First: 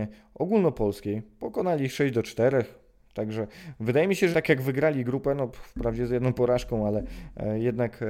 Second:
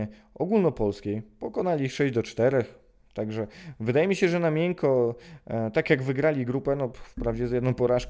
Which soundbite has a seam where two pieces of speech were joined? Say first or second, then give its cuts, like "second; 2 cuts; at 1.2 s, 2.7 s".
first; 1 cut; at 4.3 s